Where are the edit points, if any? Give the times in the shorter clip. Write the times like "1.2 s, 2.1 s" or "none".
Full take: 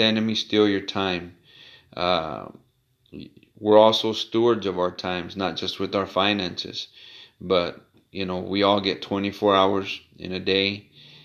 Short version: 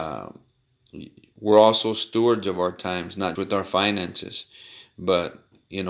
3.4 s